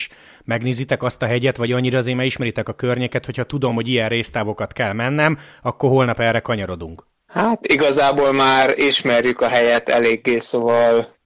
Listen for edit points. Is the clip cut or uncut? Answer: uncut